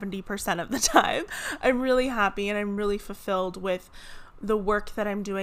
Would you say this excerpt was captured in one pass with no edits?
yes; 0 cuts

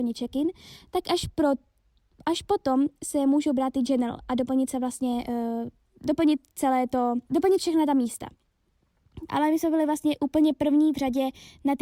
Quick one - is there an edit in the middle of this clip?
yes; 2 cuts; at 7.2 s, 9.3 s

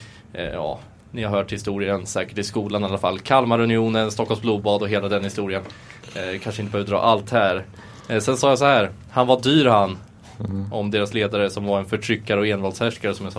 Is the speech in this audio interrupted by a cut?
no; 0 cuts

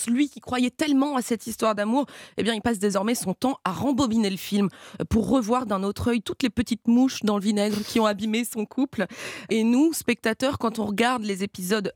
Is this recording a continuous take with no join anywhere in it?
no; 1 cut; at 9.5 s

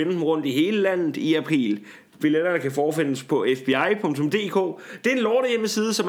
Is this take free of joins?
yes; 0 cuts

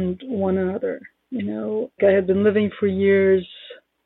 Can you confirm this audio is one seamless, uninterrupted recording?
no; 1 cut; at 2.0 s

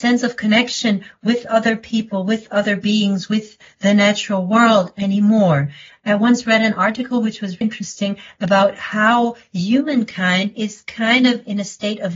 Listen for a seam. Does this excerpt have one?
yes; 2 cuts; at 5.9 s, 7.6 s

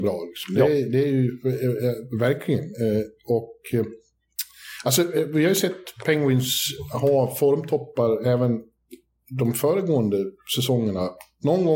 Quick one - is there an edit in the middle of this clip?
no; 0 cuts

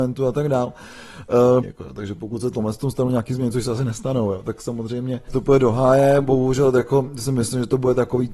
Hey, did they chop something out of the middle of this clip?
yes; 2 cuts; at 1.6 s, 5.3 s

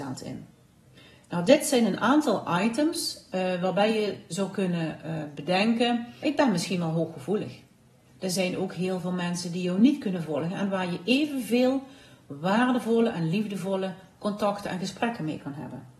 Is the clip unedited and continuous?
no; 2 cuts; at 6.2 s, 8.1 s

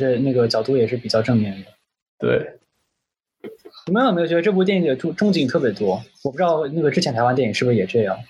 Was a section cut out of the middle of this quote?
no; 0 cuts

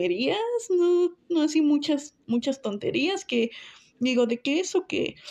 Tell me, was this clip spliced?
yes; 1 cut; at 2.2 s

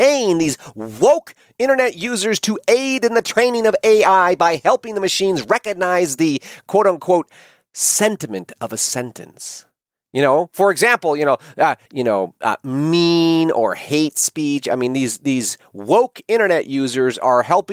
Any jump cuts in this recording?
yes; 1 cut; at 11.9 s

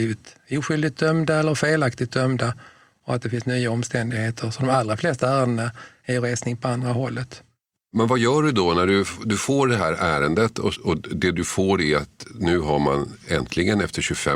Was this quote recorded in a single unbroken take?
no; 1 cut; at 10.7 s

